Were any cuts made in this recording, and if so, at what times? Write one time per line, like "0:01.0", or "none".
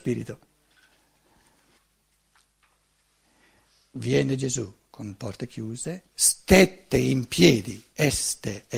0:06.1